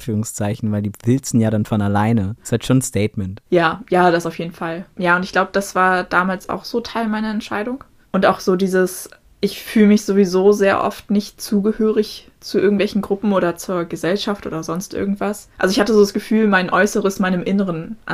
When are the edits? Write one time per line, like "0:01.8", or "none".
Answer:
0:02.4